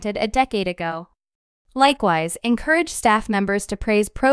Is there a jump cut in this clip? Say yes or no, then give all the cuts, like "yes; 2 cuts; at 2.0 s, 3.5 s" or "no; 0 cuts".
no; 0 cuts